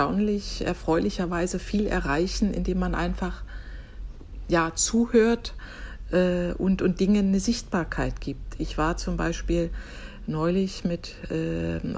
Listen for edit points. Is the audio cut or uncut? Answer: uncut